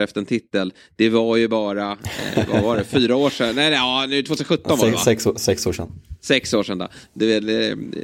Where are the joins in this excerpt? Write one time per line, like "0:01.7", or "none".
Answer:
none